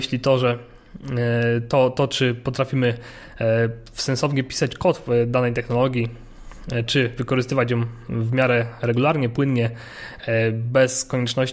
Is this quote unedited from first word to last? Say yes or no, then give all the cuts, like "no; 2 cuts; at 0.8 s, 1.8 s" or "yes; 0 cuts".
yes; 0 cuts